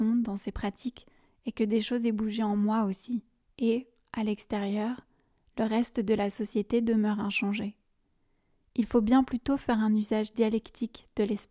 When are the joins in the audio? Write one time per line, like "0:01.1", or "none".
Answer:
0:03.4